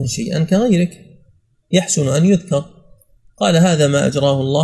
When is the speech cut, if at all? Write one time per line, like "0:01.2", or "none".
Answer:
none